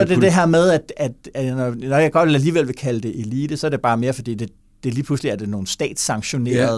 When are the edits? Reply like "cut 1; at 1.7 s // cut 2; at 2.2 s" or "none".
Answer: none